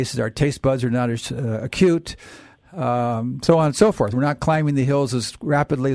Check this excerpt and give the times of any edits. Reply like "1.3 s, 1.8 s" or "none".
none